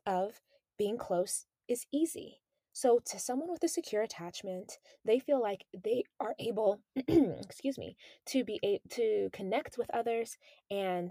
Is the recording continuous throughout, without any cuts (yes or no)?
yes